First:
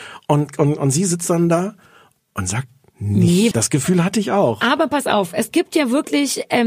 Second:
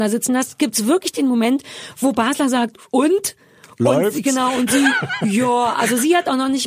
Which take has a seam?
first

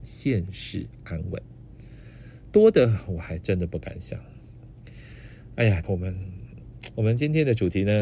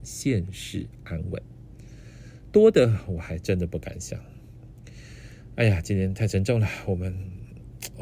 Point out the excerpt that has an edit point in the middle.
first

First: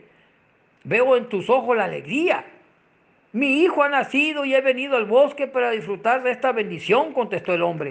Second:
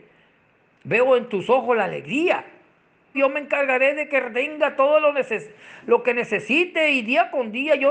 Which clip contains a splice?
second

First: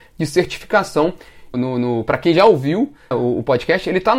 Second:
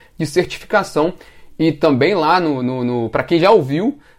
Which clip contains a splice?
first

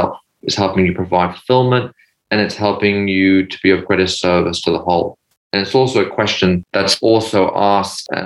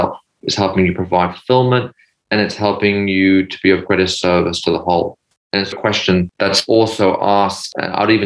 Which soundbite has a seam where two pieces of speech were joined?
second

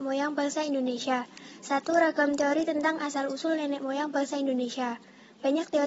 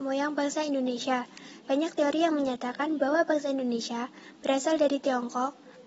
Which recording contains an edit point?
second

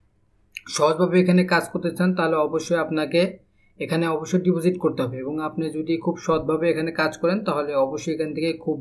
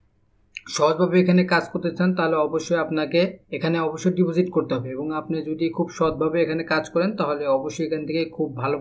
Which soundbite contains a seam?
second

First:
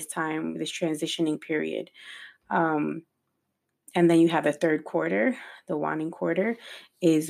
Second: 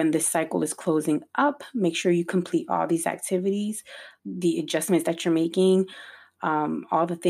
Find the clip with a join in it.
second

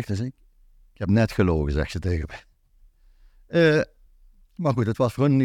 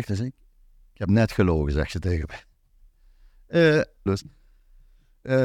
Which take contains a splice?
second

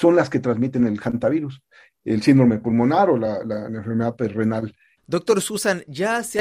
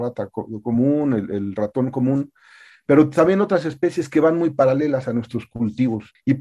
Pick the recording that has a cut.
first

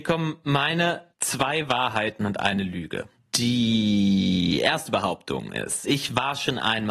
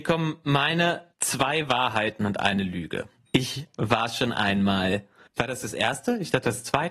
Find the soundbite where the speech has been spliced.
second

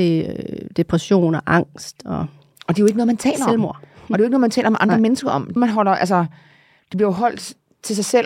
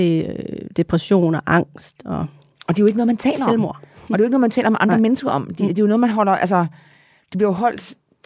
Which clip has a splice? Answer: first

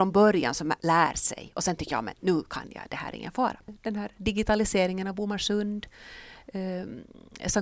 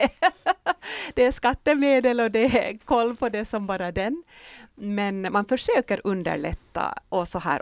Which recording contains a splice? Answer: first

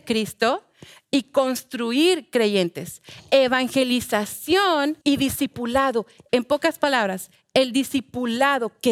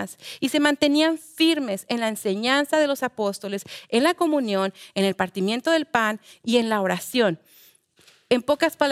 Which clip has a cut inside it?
first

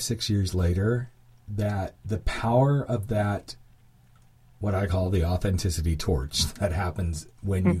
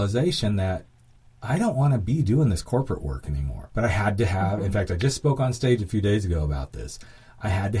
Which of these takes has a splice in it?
second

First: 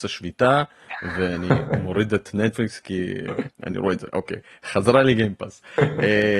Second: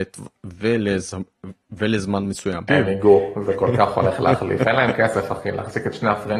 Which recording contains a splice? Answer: second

